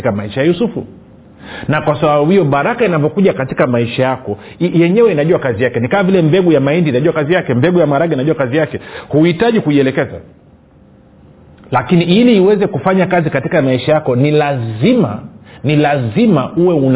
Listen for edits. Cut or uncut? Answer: uncut